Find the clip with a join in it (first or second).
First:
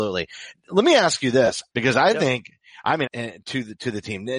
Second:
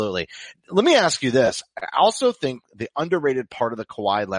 first